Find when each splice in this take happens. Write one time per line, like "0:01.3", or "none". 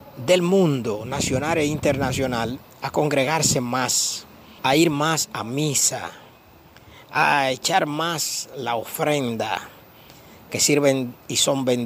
0:04.6